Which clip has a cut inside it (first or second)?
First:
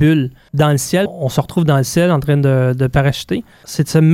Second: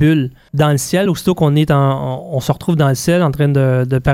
first